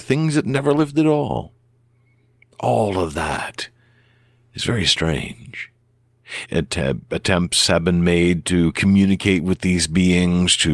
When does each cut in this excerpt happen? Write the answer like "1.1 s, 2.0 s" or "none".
6.5 s

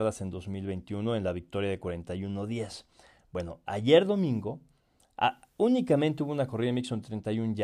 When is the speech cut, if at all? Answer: none

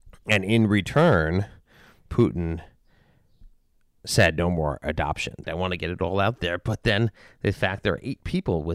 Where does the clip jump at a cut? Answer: 5.4 s

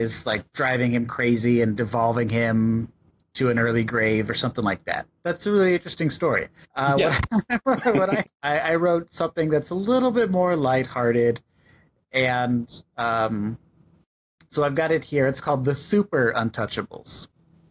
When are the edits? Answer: 6.6 s, 8.2 s

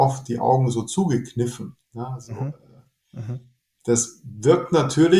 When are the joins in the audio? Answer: none

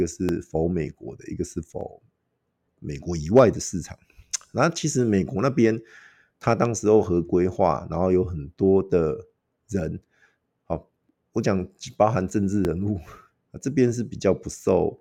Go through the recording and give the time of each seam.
13.3 s

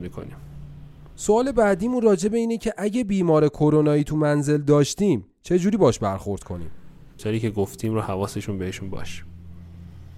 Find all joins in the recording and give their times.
7.2 s

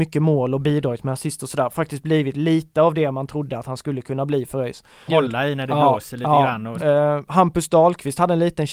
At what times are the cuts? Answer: 5.1 s, 6.8 s

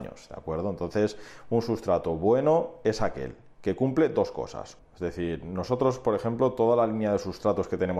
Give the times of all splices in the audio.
4.8 s

